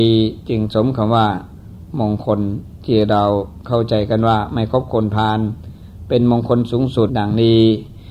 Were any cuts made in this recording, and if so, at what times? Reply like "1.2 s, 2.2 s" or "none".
7.1 s